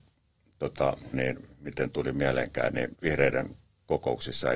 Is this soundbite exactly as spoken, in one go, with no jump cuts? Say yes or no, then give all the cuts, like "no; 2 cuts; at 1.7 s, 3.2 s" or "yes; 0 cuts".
no; 2 cuts; at 1.1 s, 2.9 s